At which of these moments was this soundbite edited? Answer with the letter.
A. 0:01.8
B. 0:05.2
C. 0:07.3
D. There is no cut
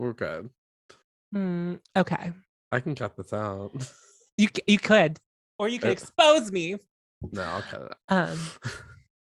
A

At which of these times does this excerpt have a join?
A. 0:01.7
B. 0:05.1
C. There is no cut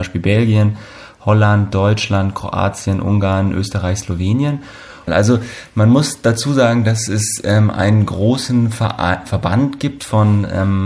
B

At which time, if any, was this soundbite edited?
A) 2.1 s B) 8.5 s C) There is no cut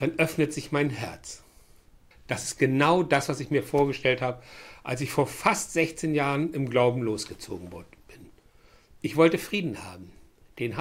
A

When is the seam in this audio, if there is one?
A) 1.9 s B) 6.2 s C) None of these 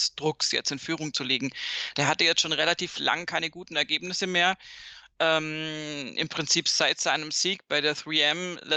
C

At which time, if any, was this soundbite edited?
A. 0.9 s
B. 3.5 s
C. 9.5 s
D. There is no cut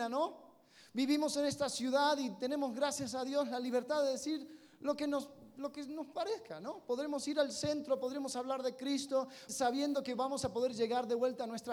C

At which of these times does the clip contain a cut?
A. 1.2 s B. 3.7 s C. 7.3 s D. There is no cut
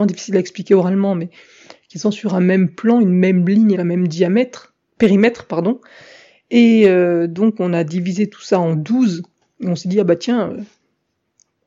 B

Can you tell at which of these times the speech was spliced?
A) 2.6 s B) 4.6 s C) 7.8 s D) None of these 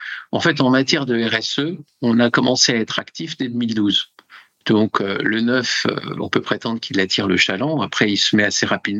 B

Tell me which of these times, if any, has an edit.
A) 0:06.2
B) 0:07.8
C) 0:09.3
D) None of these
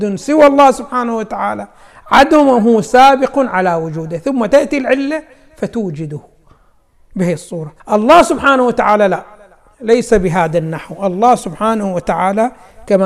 B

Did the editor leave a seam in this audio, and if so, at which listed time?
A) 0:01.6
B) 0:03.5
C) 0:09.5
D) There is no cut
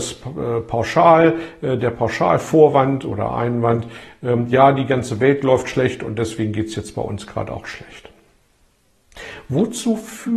D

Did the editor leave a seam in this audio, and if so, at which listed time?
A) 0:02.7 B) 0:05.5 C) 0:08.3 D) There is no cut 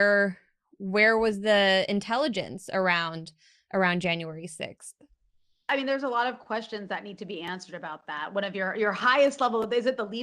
D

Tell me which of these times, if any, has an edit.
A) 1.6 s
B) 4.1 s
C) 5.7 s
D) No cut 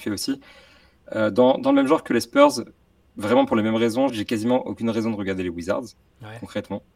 B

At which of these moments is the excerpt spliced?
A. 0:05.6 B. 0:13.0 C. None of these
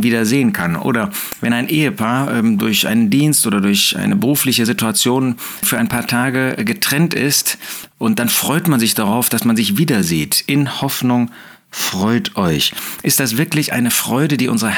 A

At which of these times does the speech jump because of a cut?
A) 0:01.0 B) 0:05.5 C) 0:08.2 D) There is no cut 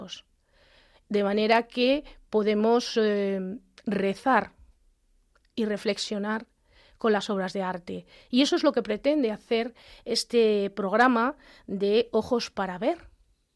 D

